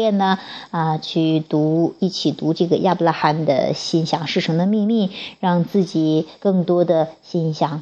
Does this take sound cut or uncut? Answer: uncut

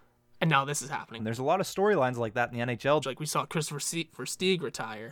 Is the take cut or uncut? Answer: cut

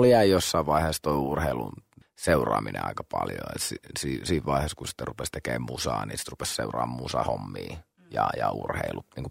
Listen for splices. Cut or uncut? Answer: uncut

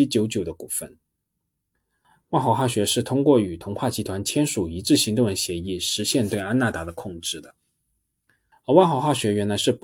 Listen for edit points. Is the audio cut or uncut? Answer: cut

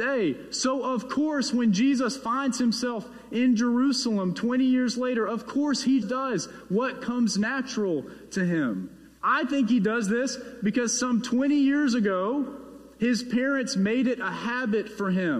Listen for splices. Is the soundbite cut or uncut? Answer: cut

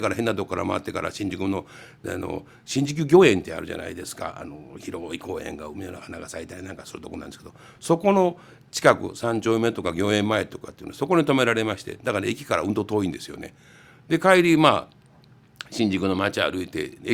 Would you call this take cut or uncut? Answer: uncut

